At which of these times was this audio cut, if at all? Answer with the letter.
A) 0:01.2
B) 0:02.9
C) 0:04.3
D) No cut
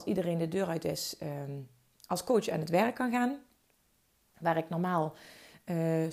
C